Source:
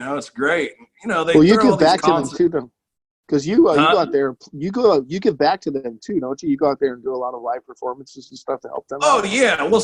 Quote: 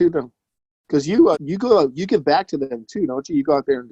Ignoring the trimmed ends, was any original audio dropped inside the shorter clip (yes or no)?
yes